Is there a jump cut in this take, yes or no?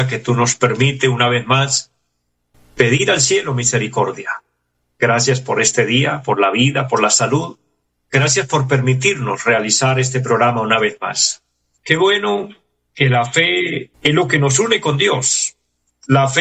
yes